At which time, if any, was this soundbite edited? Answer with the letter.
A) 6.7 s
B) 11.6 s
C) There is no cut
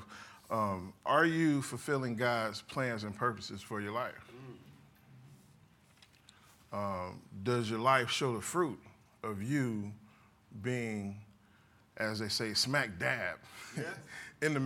C